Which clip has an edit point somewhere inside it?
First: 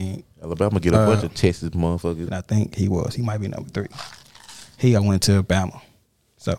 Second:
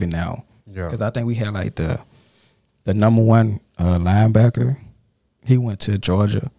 first; 2 cuts; at 2.3 s, 5.0 s

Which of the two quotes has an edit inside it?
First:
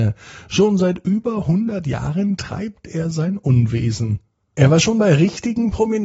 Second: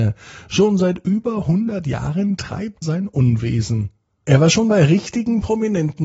second; 1 cut; at 2.8 s

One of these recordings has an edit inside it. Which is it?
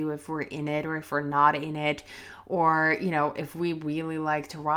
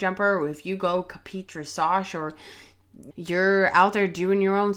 second; 1 cut; at 3.1 s

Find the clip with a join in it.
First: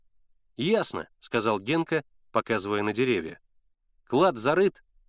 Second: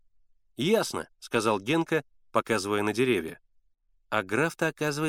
second; 1 cut; at 3.9 s

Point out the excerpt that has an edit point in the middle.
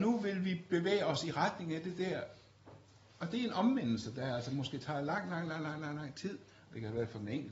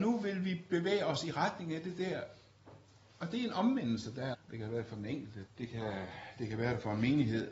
second; 2 cuts; at 4.3 s, 5.5 s

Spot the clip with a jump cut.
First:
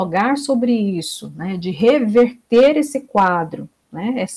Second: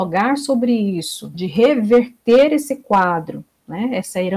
second; 1 cut; at 1.3 s

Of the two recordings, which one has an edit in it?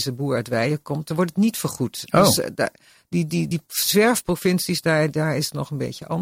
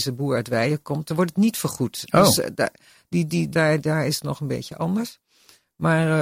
second; 1 cut; at 3.5 s

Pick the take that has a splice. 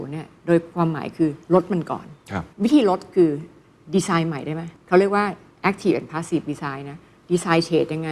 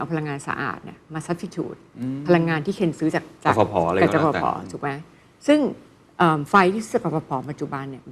first; 2 cuts; at 2.5 s, 4.8 s

